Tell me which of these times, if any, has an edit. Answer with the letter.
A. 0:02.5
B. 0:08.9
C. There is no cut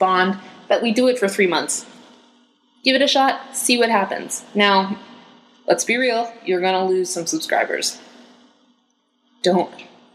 C